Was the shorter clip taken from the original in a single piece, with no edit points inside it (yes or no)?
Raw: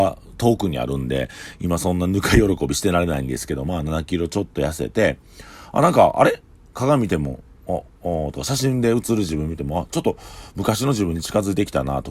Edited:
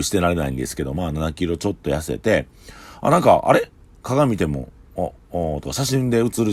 yes